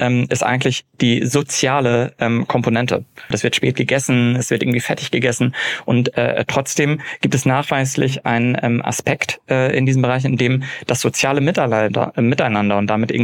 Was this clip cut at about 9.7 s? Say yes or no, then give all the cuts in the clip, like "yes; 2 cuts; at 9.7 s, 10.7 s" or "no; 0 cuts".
no; 1 cut; at 3.3 s